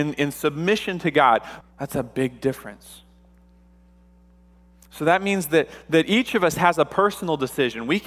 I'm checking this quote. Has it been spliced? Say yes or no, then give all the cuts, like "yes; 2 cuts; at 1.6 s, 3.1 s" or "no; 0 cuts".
yes; 1 cut; at 1.6 s